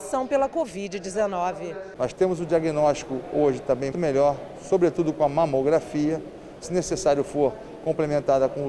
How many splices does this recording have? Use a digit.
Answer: 2